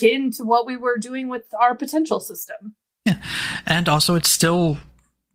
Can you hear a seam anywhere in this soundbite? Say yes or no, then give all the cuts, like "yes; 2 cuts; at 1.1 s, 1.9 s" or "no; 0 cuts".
no; 0 cuts